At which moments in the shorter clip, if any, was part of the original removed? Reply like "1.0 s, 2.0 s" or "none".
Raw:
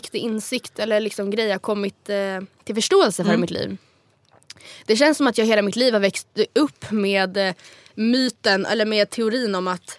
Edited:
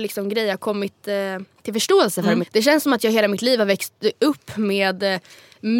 2.4 s